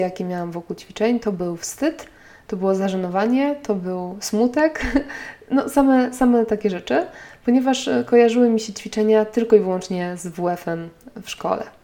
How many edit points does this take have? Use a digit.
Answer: 0